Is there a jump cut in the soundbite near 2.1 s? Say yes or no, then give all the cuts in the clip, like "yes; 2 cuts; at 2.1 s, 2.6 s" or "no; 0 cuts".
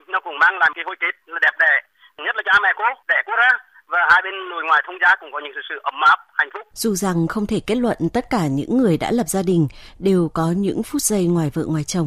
no; 1 cut; at 6.7 s